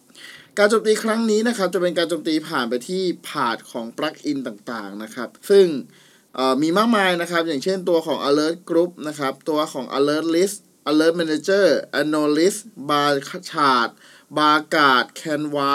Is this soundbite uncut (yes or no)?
no